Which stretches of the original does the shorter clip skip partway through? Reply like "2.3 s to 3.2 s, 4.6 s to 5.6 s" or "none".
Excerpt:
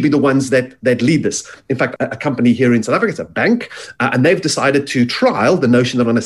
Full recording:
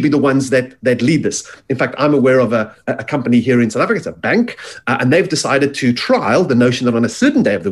2.0 s to 2.8 s